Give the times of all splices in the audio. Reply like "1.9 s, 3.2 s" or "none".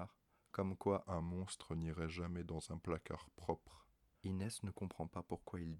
4.1 s